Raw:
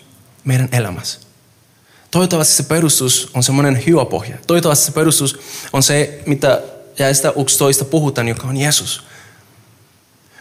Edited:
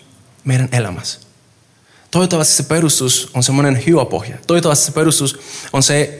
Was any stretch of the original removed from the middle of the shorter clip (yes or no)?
no